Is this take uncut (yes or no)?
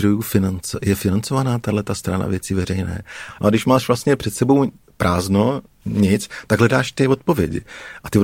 no